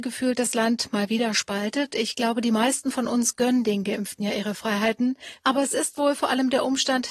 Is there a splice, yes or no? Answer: yes